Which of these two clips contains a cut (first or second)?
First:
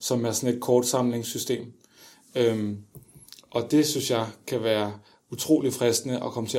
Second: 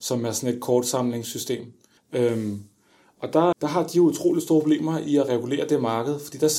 second